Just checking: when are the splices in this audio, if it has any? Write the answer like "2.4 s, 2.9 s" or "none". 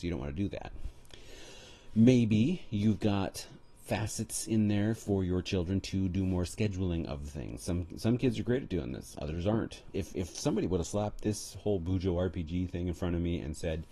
9.9 s